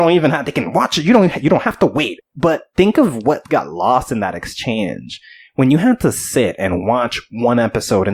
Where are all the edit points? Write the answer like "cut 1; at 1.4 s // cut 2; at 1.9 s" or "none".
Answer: cut 1; at 2.2 s